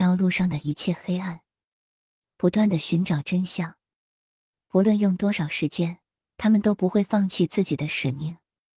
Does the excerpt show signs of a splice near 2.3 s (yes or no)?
no